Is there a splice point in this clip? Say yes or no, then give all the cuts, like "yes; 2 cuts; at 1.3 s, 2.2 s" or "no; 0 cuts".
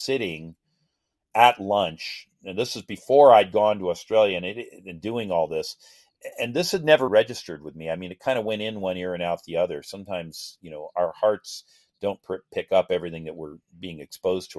yes; 1 cut; at 7.1 s